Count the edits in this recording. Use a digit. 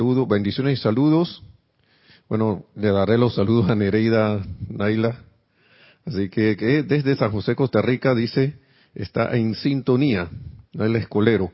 0